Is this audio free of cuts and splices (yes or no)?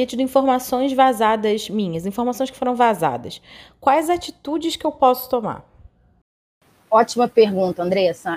yes